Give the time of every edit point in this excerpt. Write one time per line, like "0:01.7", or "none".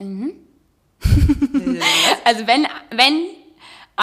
none